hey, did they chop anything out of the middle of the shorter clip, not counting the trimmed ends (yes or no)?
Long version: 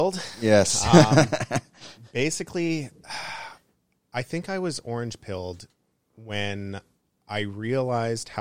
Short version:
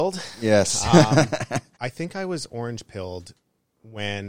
yes